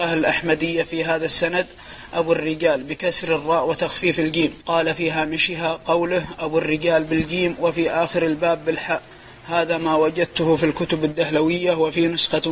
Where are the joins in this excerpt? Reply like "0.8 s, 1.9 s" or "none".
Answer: 4.6 s